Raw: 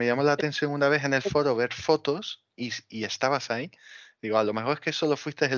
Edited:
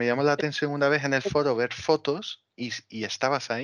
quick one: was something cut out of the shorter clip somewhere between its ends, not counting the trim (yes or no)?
no